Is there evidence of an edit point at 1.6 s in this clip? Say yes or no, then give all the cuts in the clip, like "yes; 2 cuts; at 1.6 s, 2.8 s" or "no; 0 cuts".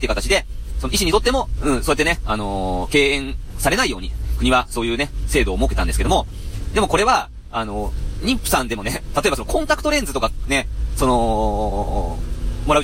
yes; 1 cut; at 1.6 s